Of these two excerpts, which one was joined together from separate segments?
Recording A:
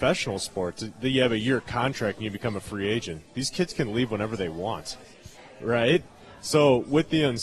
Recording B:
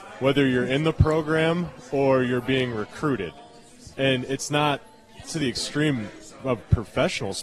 B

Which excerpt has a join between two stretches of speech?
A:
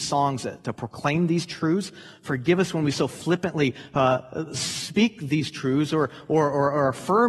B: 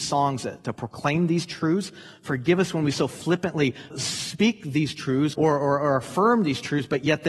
B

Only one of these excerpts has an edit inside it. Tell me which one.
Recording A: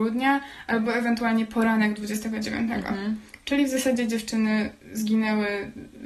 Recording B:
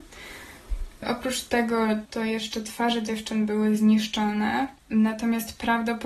B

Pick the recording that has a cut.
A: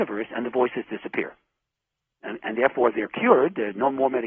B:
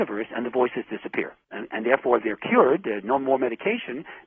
B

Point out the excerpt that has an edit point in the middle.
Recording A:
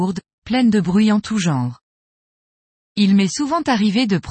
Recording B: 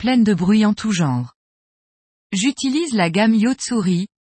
B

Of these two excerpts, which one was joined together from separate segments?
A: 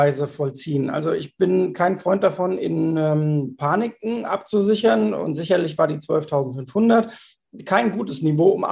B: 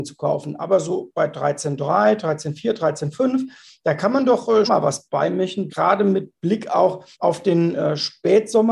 B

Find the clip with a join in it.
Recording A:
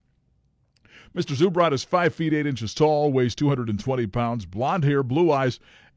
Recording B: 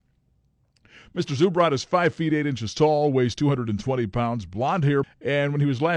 B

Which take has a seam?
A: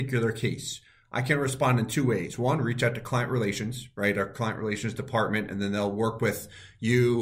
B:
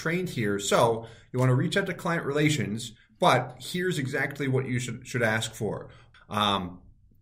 B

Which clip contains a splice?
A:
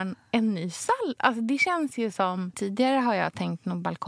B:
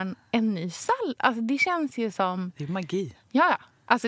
A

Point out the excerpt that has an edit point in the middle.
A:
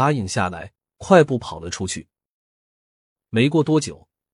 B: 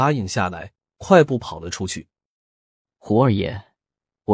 B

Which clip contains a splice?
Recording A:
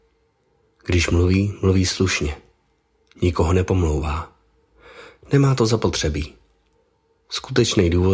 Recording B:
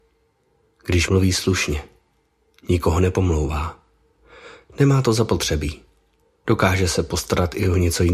B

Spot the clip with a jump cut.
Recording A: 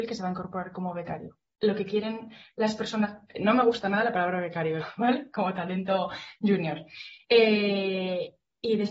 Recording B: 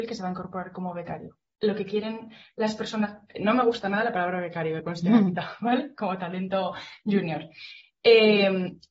A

